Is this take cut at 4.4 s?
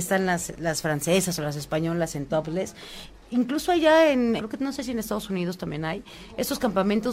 yes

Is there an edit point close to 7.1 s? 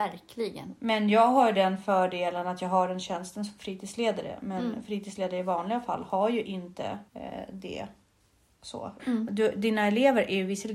yes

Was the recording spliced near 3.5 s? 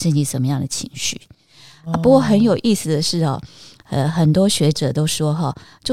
no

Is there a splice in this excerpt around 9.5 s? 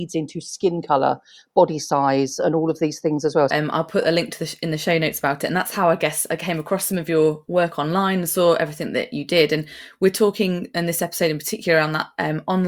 no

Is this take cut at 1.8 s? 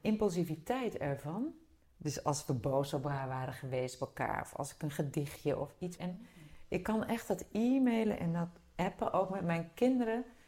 yes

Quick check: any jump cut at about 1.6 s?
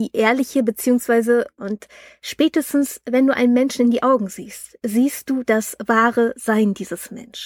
yes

